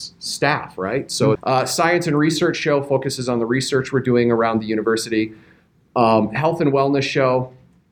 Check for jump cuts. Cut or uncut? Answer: cut